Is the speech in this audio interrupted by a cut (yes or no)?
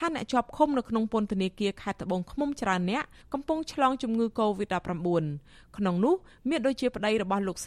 no